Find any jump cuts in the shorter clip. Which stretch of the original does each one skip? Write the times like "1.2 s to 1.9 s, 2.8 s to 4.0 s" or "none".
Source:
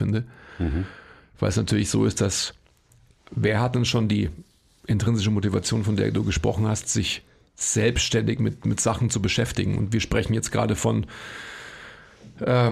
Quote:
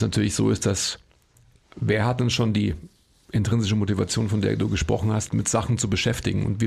6.8 s to 8.6 s